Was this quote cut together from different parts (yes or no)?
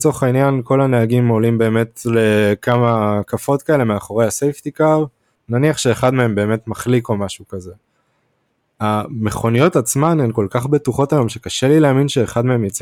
yes